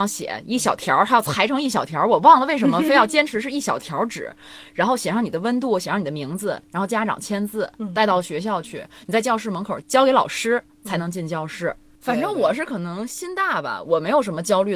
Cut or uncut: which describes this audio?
cut